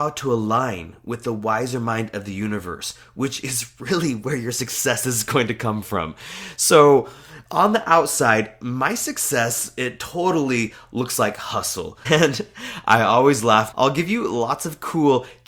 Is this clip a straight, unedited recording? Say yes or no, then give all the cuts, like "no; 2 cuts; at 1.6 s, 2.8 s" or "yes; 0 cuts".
no; 2 cuts; at 12.0 s, 13.7 s